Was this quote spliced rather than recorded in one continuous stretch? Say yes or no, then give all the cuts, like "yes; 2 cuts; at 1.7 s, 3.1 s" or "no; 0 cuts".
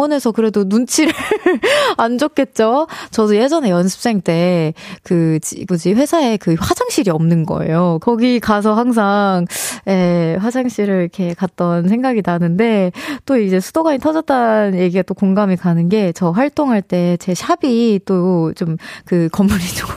yes; 2 cuts; at 5.7 s, 8.0 s